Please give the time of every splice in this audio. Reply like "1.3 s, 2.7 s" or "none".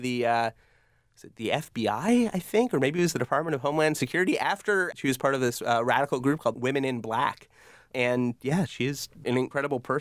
4.9 s, 6.5 s